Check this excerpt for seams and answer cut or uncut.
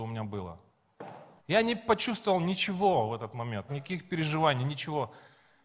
cut